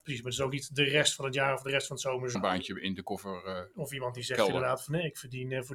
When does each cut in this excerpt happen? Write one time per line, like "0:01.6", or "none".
0:02.3

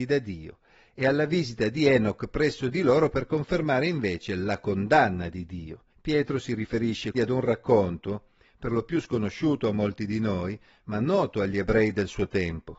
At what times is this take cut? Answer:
0:05.9
0:07.1

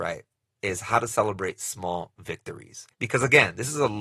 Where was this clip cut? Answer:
0:02.9

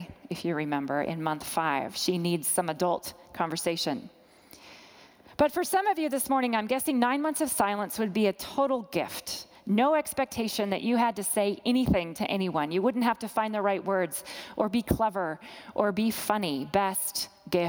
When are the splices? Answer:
none

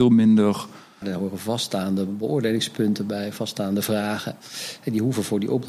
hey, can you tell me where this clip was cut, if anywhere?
0:01.0

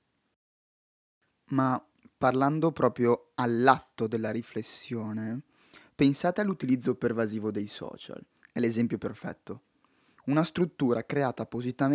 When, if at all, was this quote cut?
none

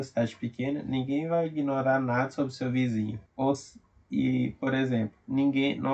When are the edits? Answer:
0:03.3

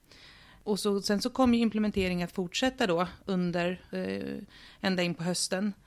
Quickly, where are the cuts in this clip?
0:03.9

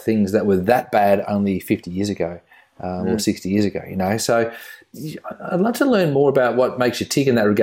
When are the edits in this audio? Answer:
none

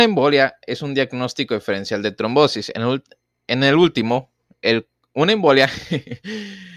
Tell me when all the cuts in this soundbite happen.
none

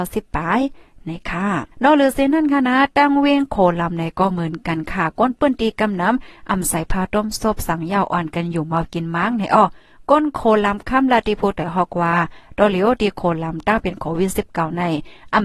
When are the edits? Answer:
0:01.7
0:10.8

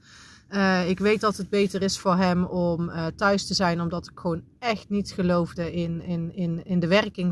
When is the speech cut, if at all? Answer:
none

